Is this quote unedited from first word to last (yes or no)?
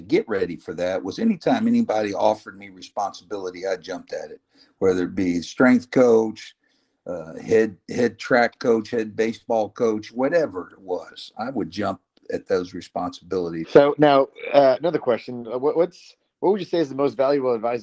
no